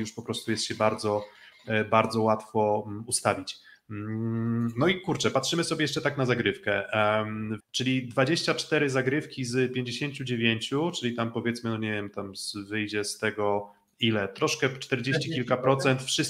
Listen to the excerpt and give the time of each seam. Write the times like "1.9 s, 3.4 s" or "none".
7.6 s